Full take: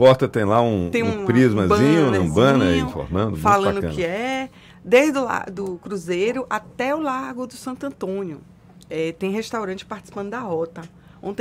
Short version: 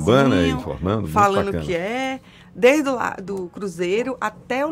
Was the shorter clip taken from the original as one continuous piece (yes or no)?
yes